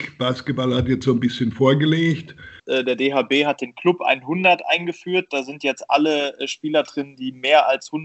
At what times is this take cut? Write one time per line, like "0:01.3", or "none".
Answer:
0:02.6